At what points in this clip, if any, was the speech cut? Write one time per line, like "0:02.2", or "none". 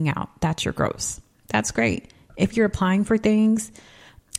none